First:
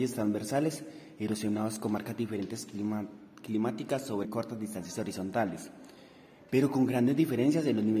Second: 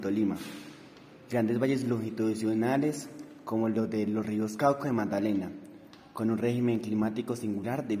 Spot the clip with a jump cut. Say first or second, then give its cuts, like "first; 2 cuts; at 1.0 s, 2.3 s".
first; 1 cut; at 4.2 s